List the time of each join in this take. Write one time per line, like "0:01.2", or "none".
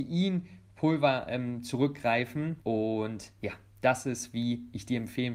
0:02.6